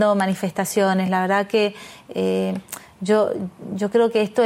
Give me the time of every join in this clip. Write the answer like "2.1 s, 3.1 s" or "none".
none